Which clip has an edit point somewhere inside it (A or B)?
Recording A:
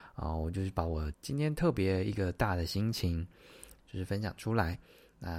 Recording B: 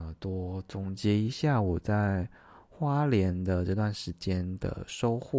A